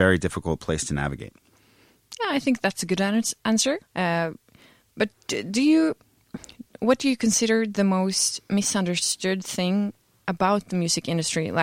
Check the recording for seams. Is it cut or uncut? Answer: cut